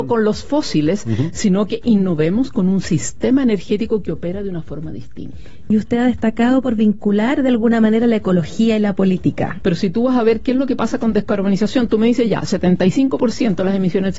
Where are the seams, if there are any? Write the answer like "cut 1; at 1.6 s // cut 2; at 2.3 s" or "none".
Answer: cut 1; at 5.7 s // cut 2; at 9.6 s